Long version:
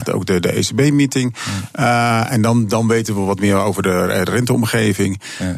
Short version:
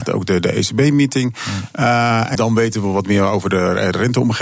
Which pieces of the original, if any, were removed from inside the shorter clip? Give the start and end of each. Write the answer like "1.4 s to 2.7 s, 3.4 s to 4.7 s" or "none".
2.4 s to 2.7 s